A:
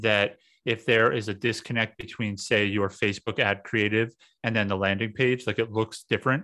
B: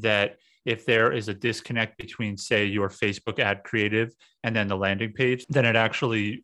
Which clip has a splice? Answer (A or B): B